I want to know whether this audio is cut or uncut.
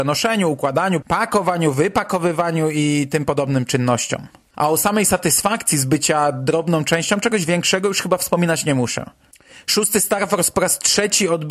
cut